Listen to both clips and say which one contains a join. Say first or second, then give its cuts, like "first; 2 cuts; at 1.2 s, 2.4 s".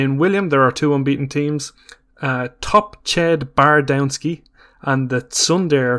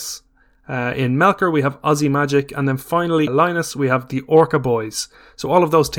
second; 1 cut; at 3.3 s